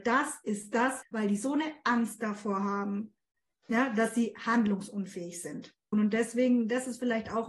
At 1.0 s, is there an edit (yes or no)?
yes